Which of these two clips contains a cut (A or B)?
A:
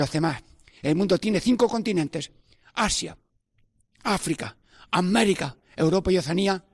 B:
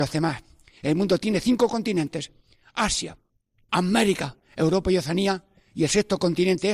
B